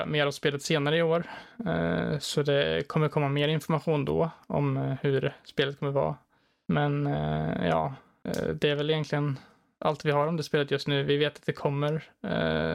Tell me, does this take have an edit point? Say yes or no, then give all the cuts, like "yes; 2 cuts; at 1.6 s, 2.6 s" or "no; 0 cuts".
no; 0 cuts